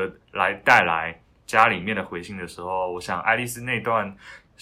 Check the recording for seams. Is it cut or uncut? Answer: uncut